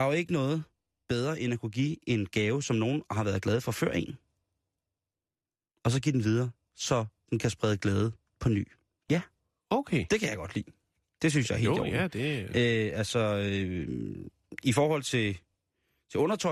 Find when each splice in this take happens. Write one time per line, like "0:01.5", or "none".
0:09.1